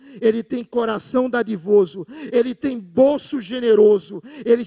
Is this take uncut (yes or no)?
yes